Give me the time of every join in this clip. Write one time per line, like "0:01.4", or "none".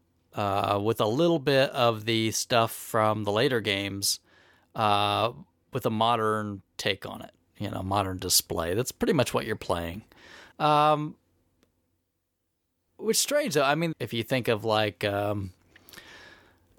0:10.5
0:13.9